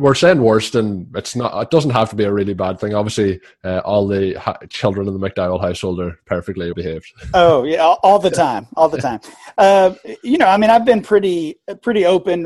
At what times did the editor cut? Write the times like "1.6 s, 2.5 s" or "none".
6.7 s